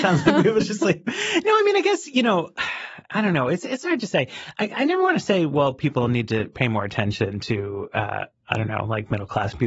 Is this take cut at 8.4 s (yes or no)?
no